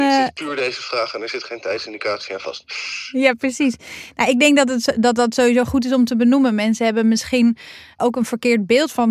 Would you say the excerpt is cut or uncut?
cut